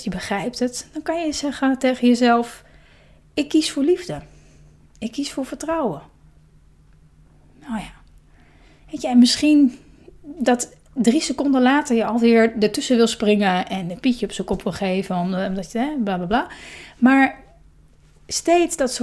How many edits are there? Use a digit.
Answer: 0